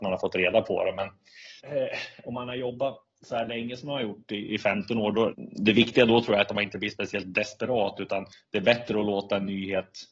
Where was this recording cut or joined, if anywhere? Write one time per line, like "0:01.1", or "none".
0:01.6
0:05.3

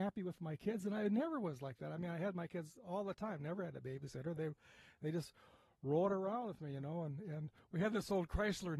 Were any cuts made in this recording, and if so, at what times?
none

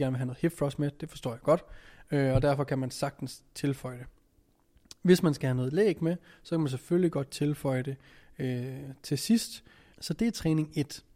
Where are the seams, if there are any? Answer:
0:09.9

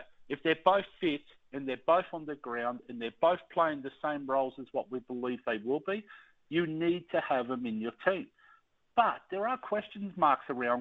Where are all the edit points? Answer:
none

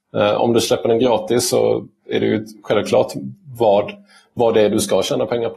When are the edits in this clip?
none

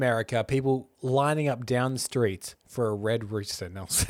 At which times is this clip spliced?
none

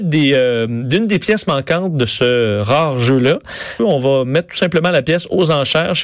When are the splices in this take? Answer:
0:03.8

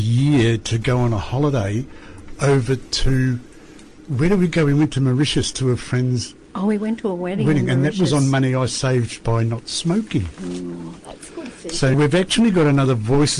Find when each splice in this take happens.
0:11.9

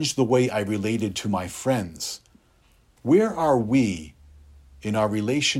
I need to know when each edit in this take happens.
0:03.0

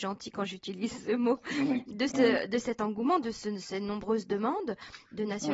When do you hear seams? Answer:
0:02.1

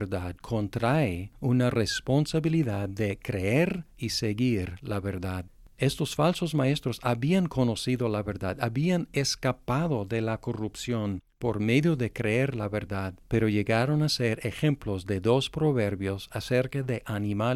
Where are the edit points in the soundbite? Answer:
none

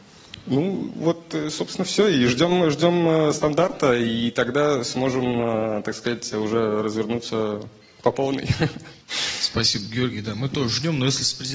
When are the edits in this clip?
0:09.0

